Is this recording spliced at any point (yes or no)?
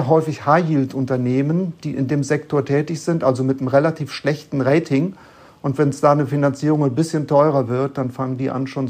no